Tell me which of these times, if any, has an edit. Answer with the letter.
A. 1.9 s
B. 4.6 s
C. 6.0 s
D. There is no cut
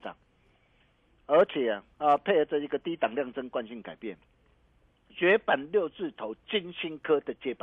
A